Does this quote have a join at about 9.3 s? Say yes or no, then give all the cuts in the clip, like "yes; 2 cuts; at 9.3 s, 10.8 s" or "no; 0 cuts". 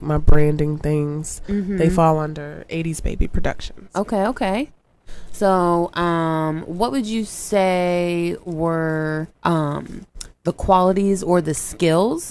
yes; 1 cut; at 9.3 s